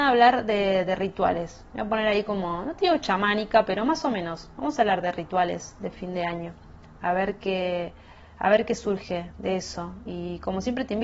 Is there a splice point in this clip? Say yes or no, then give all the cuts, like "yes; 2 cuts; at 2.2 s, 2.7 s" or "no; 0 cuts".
no; 0 cuts